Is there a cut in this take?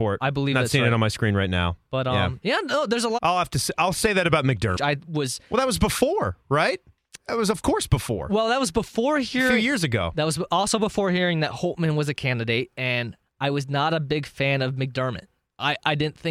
yes; 2 cuts; at 3.2 s, 4.8 s

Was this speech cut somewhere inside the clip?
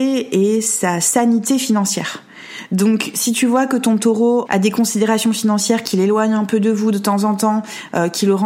yes; 1 cut; at 4.5 s

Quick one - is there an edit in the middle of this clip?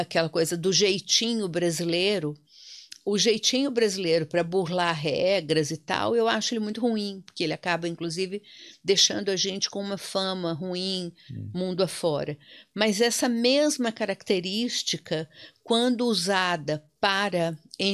no; 0 cuts

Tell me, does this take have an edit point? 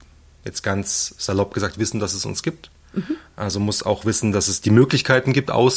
no; 0 cuts

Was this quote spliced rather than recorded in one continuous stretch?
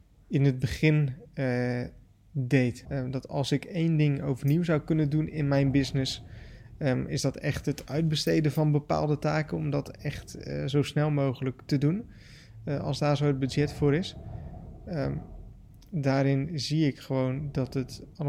yes; 1 cut; at 2.8 s

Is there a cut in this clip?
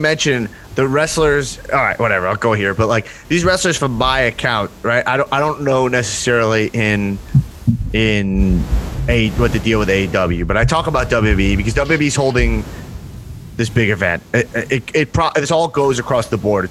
no; 0 cuts

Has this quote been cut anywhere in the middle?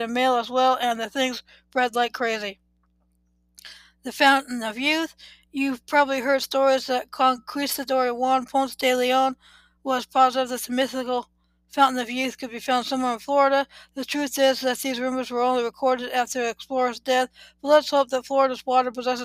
no; 0 cuts

